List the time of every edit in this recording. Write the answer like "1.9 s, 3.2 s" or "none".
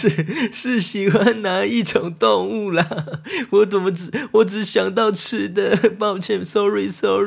none